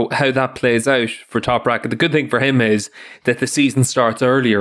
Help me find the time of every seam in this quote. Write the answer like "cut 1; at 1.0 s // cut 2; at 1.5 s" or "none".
none